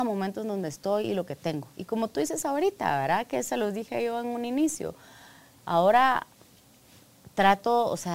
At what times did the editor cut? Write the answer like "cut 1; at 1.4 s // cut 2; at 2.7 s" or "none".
cut 1; at 5.6 s